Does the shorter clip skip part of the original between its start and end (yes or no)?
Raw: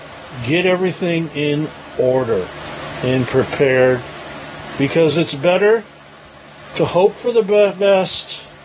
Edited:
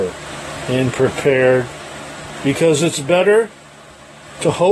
no